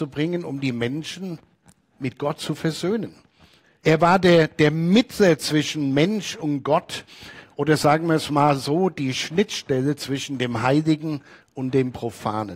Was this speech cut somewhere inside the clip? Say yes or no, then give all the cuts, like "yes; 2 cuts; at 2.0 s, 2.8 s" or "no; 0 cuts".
yes; 1 cut; at 3.8 s